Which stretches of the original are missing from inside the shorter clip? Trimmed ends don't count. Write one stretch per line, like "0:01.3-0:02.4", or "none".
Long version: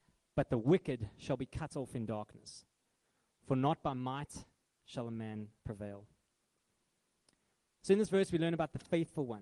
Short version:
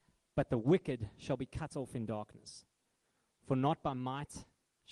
none